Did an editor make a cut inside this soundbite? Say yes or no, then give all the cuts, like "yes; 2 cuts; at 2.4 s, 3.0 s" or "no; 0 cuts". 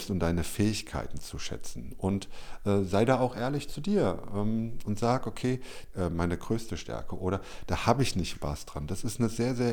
yes; 2 cuts; at 5.9 s, 8.3 s